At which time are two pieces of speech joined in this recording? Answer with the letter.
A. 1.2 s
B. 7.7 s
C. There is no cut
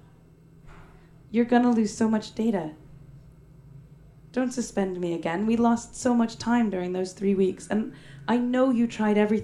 A